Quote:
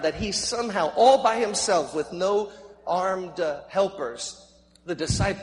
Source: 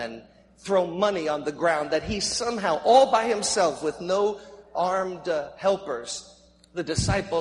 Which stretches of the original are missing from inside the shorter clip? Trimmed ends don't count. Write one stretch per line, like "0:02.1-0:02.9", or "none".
none